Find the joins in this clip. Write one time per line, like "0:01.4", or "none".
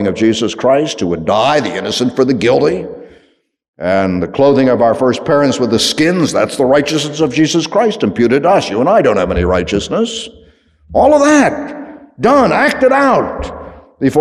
none